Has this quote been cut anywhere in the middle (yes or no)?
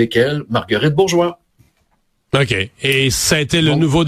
no